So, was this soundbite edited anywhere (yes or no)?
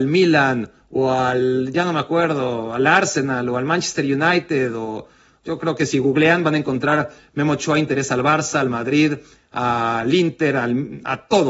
no